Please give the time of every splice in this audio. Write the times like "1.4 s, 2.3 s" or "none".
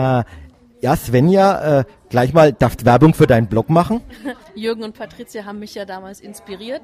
4.4 s